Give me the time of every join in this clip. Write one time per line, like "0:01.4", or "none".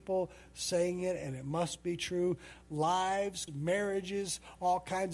0:03.5